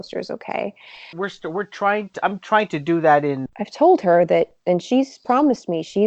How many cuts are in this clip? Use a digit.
2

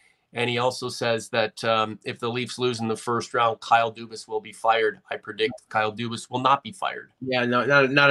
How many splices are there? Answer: 0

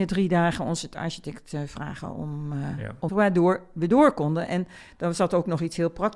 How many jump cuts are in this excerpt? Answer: 1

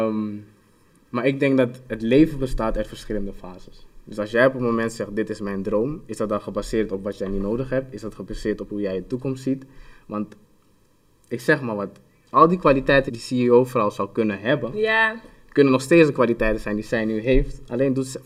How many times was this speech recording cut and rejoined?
1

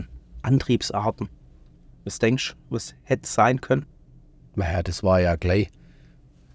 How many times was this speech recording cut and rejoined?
0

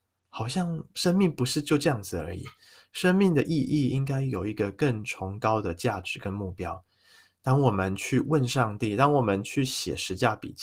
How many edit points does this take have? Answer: 0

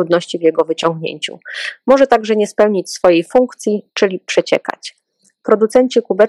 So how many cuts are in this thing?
0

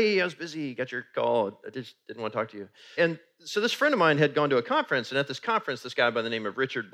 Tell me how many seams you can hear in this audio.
1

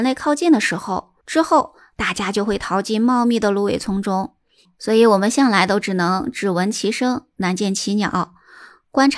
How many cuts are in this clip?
1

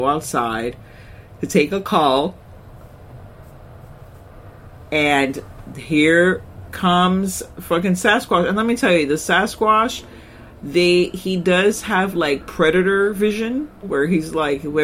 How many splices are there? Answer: 1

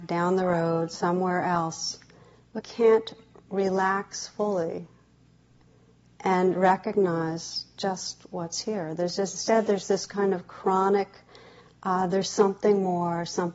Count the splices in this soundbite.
1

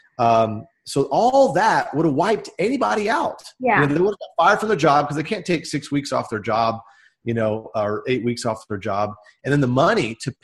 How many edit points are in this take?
1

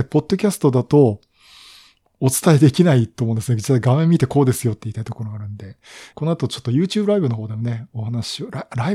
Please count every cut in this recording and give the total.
1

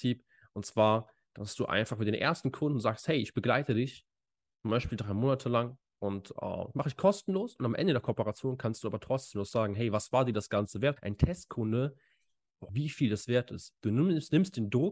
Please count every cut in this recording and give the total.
3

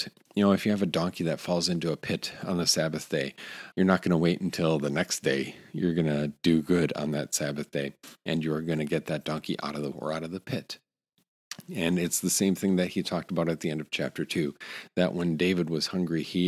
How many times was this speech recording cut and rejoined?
2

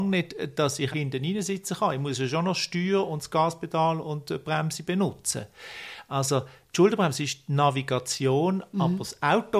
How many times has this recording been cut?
1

